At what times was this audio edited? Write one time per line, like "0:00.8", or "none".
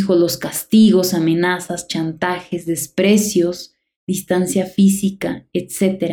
0:03.9